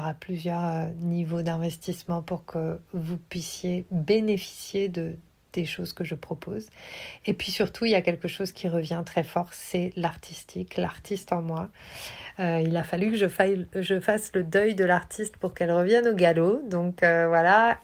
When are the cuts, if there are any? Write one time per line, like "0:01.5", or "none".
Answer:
none